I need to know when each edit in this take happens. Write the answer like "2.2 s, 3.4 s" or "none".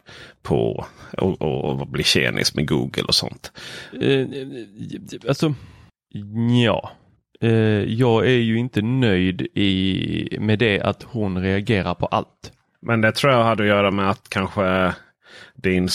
1.2 s, 3.9 s

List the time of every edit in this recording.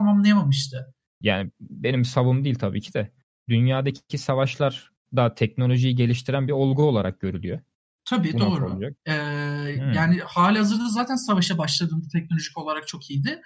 1.2 s, 9.0 s

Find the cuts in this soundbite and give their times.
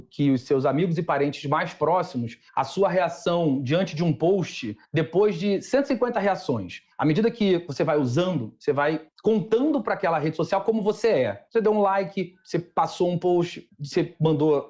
none

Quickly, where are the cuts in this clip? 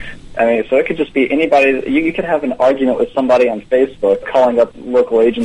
4.2 s

